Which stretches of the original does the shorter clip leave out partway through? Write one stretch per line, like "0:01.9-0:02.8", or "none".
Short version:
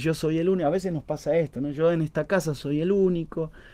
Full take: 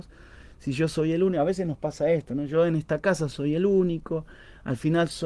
none